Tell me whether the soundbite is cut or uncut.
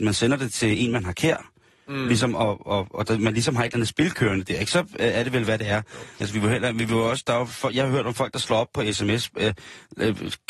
cut